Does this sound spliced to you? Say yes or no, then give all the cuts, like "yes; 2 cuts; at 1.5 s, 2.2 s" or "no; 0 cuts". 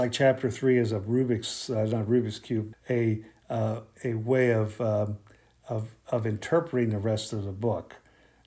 yes; 1 cut; at 2.7 s